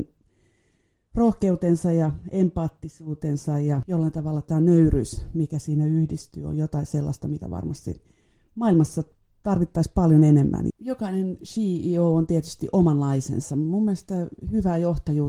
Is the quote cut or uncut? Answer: cut